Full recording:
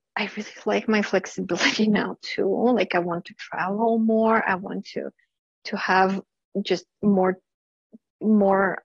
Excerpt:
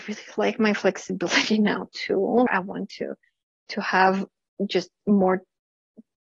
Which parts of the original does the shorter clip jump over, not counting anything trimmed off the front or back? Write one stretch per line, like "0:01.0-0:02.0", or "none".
0:02.7-0:04.4